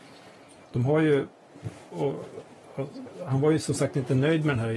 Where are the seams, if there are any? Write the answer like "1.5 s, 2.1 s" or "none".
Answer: none